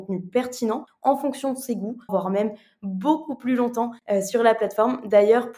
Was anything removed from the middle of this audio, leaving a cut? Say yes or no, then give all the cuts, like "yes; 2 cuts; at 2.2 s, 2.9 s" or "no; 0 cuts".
yes; 1 cut; at 2.1 s